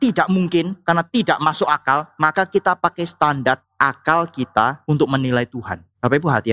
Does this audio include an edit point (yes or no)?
no